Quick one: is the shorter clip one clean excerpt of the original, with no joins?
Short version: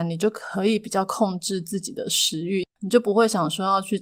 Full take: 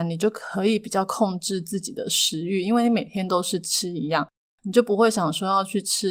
no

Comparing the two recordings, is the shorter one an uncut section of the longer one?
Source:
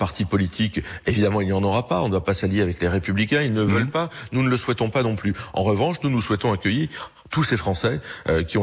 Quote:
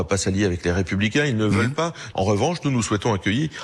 no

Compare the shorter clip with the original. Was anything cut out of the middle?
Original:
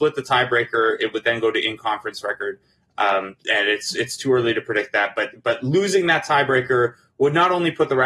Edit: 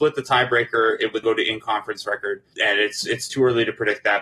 yes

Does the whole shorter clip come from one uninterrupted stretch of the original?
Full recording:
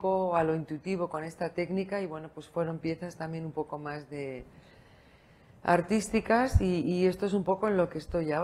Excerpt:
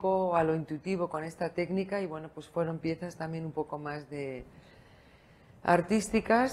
yes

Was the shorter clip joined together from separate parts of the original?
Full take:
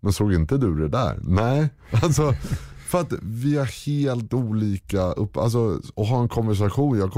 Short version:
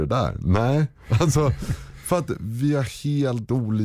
no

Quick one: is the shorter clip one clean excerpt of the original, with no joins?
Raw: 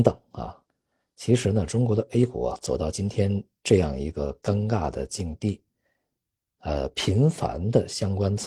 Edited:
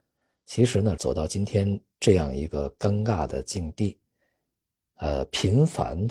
no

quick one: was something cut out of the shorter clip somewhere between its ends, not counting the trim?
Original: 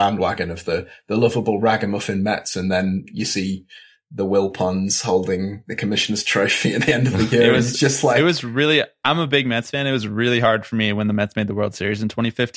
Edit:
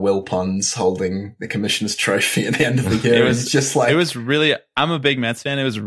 no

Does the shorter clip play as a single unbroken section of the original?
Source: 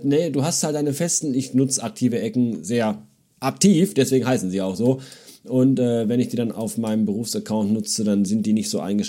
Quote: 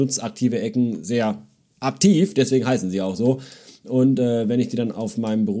yes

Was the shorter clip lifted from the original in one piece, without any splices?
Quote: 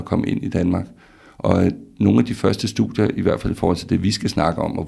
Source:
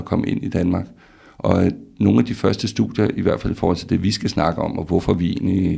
yes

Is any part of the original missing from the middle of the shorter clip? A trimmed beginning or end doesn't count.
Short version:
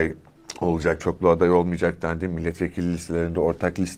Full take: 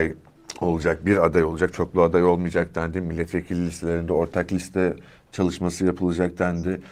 yes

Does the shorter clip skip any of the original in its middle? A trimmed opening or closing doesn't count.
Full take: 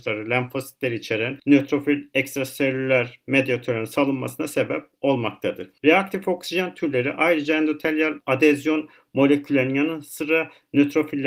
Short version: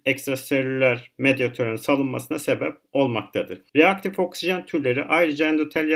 no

